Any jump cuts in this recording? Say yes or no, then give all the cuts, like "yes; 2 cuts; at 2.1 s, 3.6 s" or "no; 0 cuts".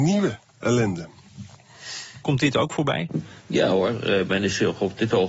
yes; 2 cuts; at 2.2 s, 3.4 s